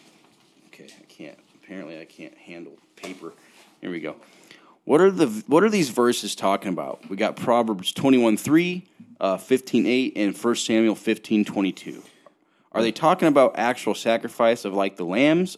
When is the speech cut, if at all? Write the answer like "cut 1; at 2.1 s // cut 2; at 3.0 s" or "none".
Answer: none